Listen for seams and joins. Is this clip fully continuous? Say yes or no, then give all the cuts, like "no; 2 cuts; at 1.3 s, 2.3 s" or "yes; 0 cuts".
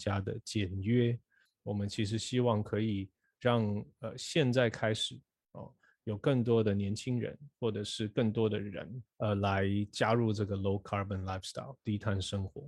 no; 2 cuts; at 1.5 s, 9.1 s